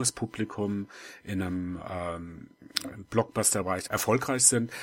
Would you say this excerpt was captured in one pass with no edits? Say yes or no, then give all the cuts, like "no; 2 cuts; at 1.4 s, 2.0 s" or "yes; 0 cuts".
no; 1 cut; at 3.9 s